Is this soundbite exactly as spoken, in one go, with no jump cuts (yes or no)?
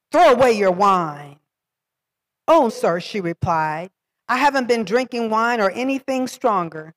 no